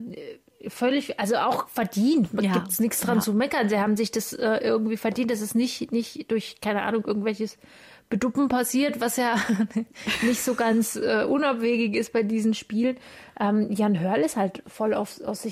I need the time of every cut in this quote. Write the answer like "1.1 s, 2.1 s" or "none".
none